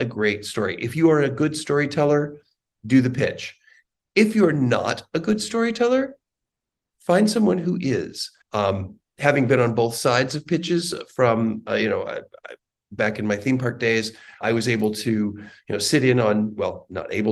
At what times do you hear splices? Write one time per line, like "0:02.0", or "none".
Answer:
0:08.4
0:14.4